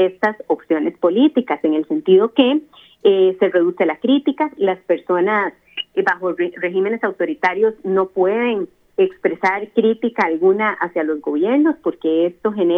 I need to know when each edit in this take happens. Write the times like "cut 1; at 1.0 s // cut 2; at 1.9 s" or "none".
none